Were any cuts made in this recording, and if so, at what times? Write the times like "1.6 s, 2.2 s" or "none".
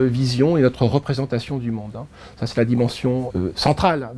3.3 s